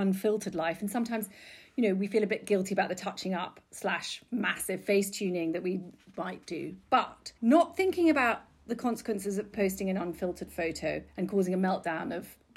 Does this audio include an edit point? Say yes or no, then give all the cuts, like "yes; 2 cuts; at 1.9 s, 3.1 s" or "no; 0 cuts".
yes; 2 cuts; at 7.4 s, 9.5 s